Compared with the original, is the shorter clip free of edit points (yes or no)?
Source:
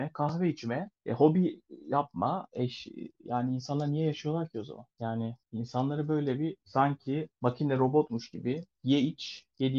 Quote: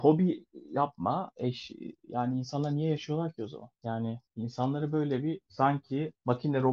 yes